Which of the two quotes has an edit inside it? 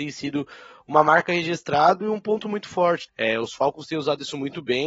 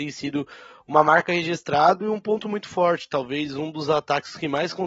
first; 1 cut; at 3.1 s

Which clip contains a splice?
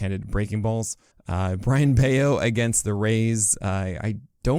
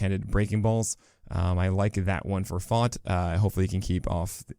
first; 1 cut; at 1.1 s

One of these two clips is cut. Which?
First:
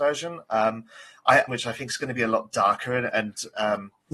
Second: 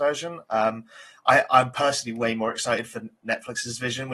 first; 1 cut; at 1.5 s

